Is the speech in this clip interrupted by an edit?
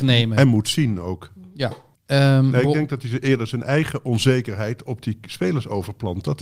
yes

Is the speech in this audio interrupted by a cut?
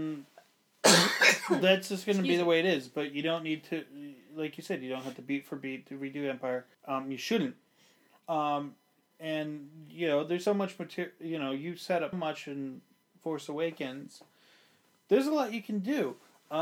yes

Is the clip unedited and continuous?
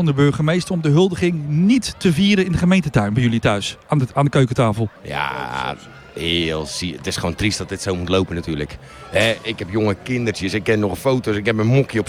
no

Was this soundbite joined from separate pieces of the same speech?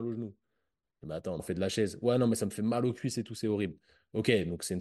yes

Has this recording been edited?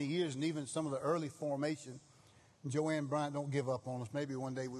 no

